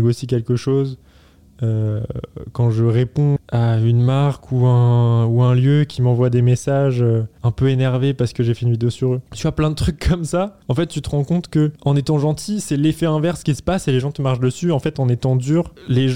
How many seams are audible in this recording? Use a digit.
3